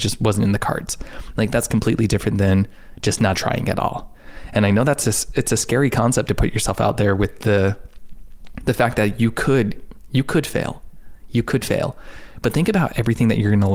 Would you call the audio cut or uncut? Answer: cut